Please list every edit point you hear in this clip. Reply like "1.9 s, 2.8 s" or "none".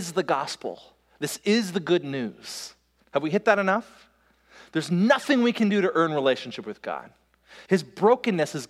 3.0 s, 7.6 s